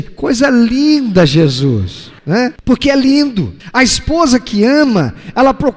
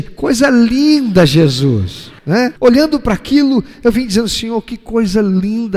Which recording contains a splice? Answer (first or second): second